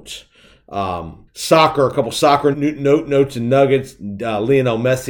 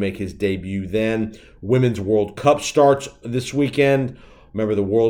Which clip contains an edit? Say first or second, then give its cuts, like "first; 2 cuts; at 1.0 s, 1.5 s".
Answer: first; 2 cuts; at 1.3 s, 2.5 s